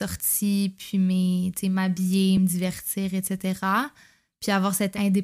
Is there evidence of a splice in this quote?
no; 0 cuts

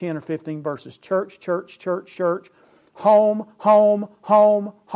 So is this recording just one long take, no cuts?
yes; 0 cuts

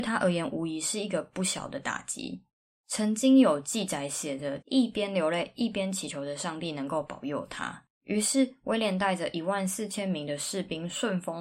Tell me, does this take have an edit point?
yes; 2 cuts; at 4.6 s, 8.0 s

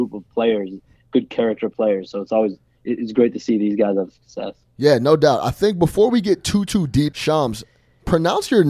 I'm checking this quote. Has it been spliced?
no; 0 cuts

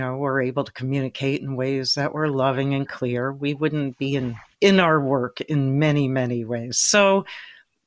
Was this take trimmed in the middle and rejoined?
yes; 1 cut; at 4.5 s

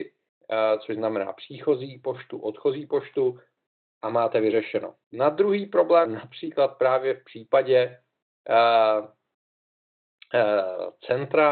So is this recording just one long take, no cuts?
no; 2 cuts; at 5.0 s, 6.1 s

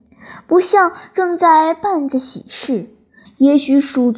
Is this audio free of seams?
no; 1 cut; at 3.2 s

